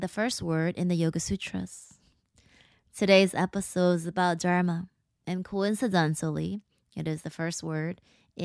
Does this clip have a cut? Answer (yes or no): no